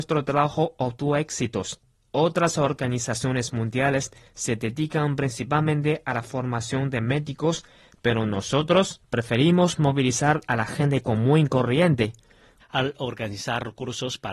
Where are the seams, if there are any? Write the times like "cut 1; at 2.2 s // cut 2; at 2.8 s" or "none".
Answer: cut 1; at 12.6 s